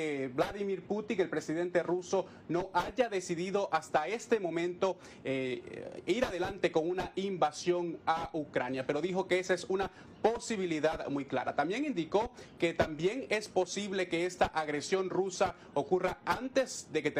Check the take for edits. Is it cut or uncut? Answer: uncut